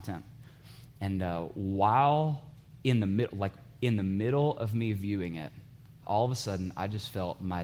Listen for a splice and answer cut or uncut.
cut